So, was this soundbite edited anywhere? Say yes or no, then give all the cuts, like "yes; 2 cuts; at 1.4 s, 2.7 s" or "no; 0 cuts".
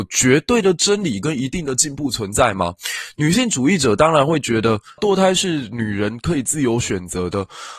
yes; 1 cut; at 5.0 s